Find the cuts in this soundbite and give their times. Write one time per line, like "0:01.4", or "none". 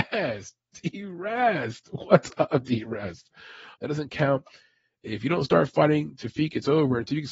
0:03.8